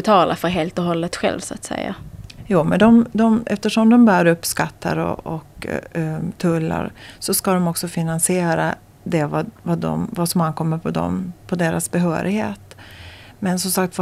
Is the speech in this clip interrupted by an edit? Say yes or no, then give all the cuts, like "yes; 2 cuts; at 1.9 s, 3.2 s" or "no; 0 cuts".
no; 0 cuts